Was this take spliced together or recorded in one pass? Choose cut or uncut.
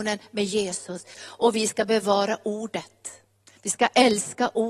cut